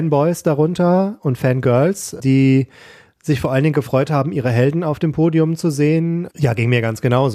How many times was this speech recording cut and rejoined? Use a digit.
1